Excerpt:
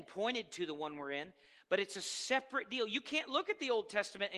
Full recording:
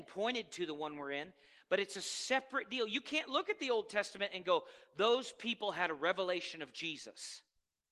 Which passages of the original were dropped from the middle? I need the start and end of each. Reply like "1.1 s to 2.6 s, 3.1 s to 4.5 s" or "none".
none